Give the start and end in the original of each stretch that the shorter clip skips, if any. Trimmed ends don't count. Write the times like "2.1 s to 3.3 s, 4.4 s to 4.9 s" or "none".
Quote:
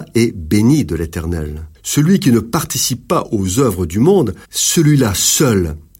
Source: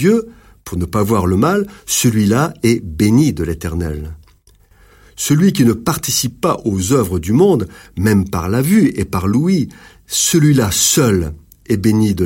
4.2 s to 5.1 s, 7.8 s to 10.0 s